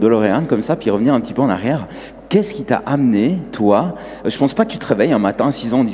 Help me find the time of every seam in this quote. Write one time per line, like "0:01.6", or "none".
none

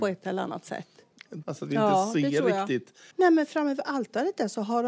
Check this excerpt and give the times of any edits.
0:01.4
0:03.1

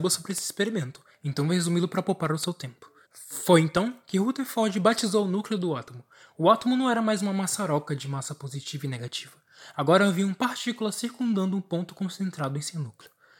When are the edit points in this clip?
0:03.0

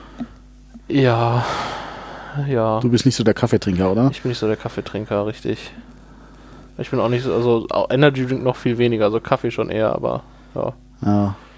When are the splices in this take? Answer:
none

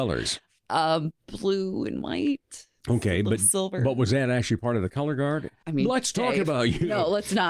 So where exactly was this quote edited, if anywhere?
0:05.6

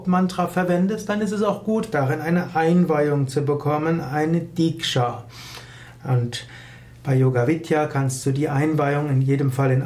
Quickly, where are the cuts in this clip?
none

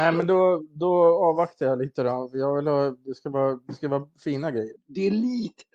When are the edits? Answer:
0:04.8

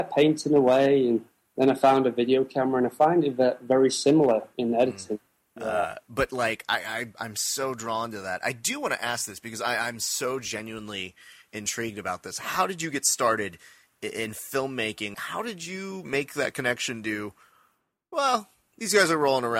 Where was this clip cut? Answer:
0:05.6
0:15.1

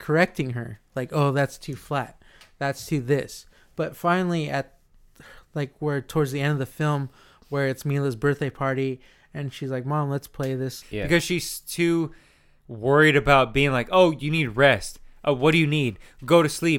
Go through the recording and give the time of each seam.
0:10.8

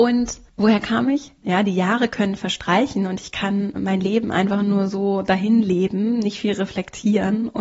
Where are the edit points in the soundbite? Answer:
0:01.4

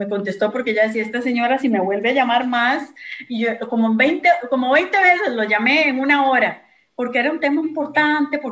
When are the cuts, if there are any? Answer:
0:07.6

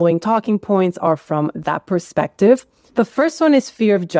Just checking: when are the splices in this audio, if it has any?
0:02.9

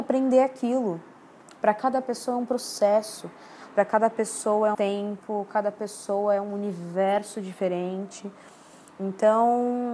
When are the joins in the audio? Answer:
0:04.7

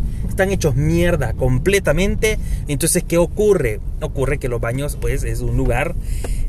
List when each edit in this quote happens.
0:02.6
0:05.0

